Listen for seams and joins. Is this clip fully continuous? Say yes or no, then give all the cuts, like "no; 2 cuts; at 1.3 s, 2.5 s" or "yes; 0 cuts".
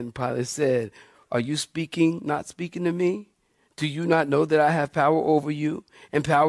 yes; 0 cuts